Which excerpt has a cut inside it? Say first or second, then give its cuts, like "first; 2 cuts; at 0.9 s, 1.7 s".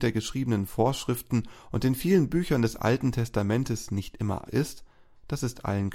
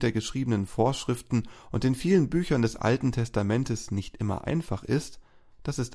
first; 1 cut; at 4.4 s